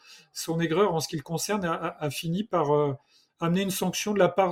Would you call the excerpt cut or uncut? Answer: uncut